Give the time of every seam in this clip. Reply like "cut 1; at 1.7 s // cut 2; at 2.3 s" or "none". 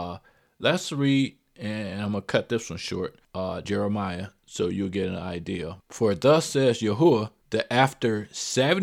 cut 1; at 3.6 s // cut 2; at 5.8 s